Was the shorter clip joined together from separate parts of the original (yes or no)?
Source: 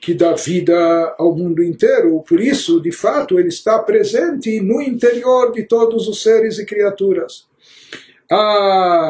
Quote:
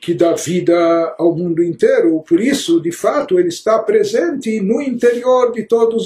no